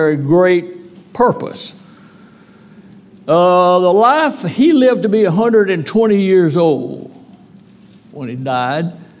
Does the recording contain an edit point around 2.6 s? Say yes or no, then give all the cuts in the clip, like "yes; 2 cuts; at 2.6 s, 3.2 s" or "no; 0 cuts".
no; 0 cuts